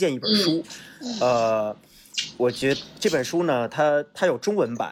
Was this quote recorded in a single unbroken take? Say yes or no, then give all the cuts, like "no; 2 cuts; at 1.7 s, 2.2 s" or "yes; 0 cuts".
yes; 0 cuts